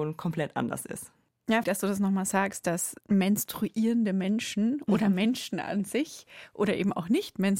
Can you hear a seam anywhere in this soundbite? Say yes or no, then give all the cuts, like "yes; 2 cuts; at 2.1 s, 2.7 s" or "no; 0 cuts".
yes; 2 cuts; at 1.6 s, 3.0 s